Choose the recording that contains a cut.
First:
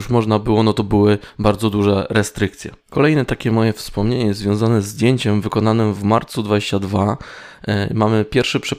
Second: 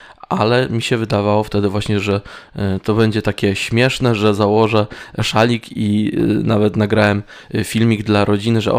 first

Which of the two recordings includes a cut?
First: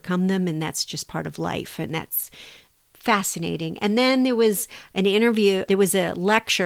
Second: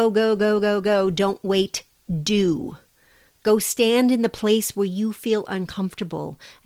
first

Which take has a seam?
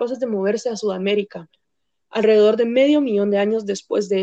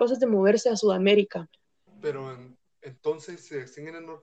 second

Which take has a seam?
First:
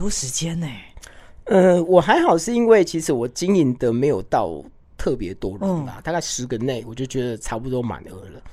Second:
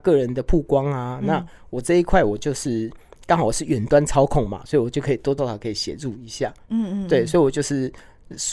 second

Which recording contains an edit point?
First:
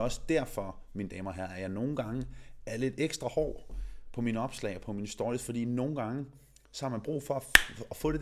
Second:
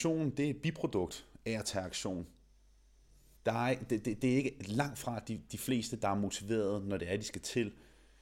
second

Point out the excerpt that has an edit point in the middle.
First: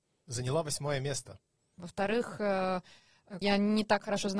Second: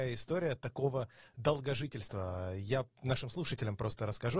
first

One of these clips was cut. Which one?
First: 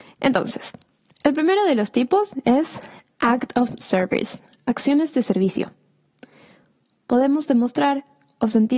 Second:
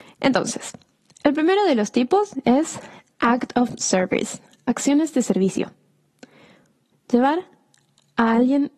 second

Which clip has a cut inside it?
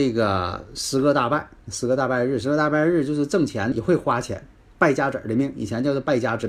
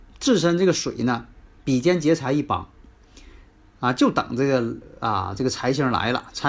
first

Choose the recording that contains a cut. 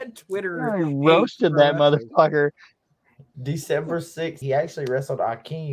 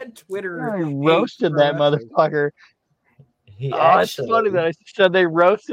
first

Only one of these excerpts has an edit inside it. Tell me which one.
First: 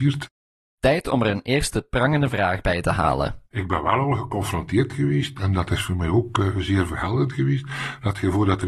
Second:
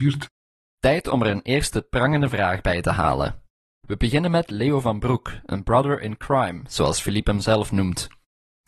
first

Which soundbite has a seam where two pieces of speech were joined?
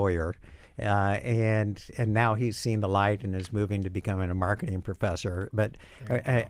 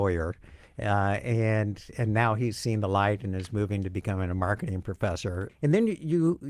second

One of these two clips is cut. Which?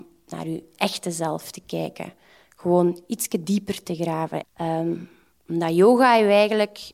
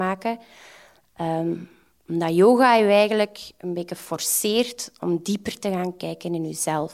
first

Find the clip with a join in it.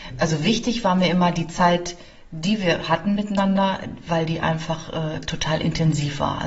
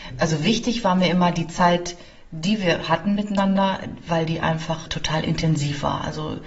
second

